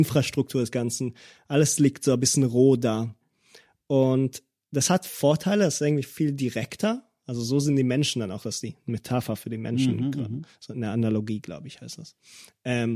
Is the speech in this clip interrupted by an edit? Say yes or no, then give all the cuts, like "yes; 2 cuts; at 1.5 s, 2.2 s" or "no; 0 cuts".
no; 0 cuts